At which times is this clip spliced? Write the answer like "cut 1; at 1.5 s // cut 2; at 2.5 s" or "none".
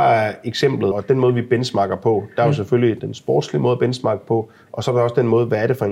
cut 1; at 0.9 s // cut 2; at 3.0 s